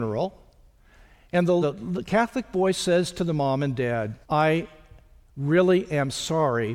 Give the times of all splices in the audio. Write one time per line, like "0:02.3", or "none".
0:01.6
0:04.2

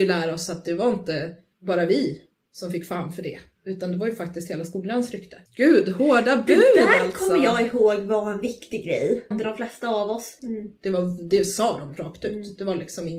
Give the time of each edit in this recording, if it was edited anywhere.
0:05.5
0:09.3
0:10.4

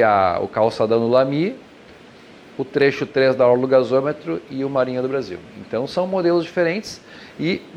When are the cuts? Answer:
none

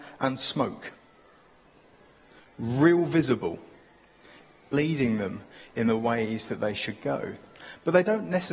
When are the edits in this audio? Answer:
0:04.7

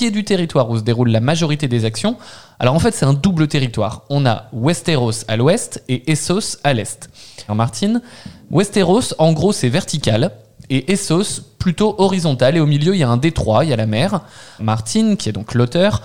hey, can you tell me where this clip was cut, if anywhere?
0:07.5
0:14.6

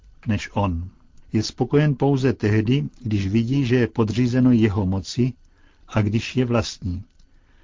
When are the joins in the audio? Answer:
0:01.2

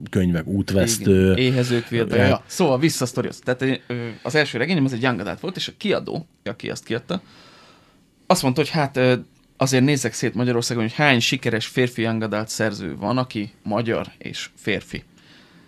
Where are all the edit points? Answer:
0:02.1
0:06.5

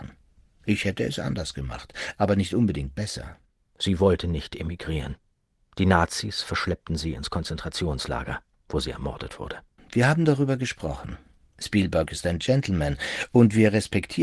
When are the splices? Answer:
0:03.6
0:09.8

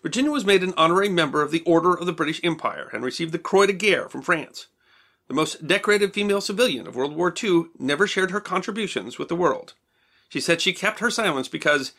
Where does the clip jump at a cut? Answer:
none

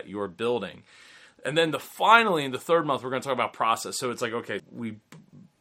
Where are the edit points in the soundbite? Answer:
0:04.6

